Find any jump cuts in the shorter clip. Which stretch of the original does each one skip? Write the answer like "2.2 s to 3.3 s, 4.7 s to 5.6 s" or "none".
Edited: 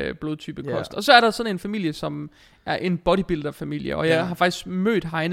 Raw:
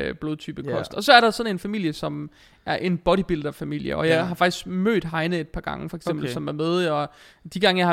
none

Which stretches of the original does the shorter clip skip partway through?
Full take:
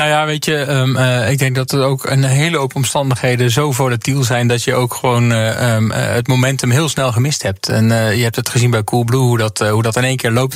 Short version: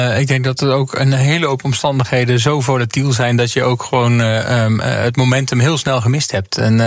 none

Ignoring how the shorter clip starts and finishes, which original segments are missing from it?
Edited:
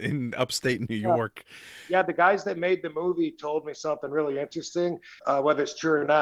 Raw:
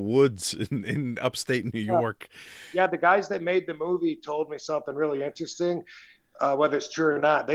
6.0 s to 6.3 s

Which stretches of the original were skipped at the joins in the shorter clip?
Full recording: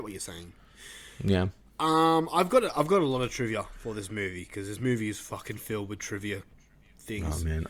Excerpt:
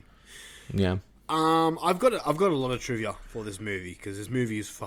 none

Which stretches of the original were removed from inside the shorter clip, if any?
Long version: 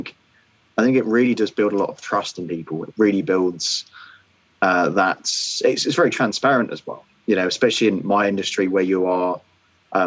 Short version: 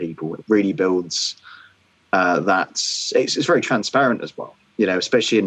none

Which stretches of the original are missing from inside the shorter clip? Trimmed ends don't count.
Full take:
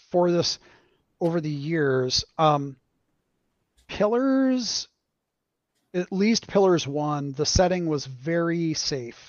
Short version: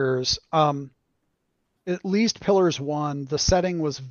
3.6 s to 5.8 s

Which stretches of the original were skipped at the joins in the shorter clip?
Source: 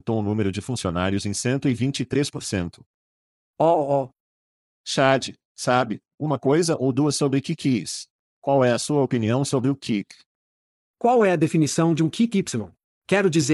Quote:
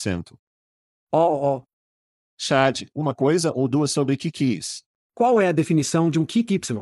5.4 s to 6.2 s, 8.3 s to 10.9 s

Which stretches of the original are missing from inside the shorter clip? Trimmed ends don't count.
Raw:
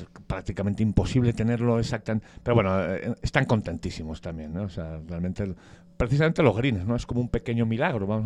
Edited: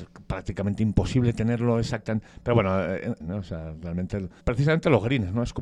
3.2 s to 4.5 s, 5.7 s to 5.9 s

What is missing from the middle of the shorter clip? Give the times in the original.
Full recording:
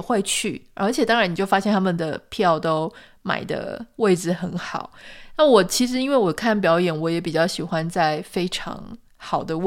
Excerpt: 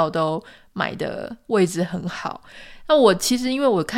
none

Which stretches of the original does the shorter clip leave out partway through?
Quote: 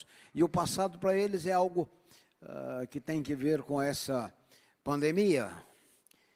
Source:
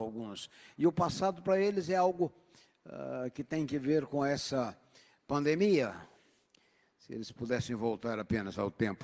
none

